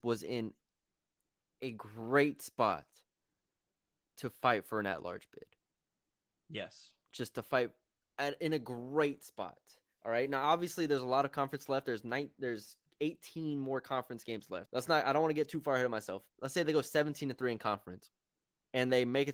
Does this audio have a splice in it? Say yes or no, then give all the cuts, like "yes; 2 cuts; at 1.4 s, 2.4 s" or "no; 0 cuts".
yes; 2 cuts; at 14.7 s, 16.3 s